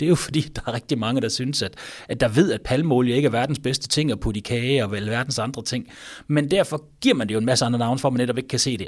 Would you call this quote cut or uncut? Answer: uncut